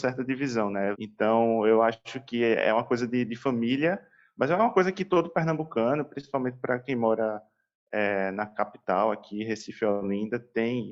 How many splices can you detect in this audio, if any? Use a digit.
1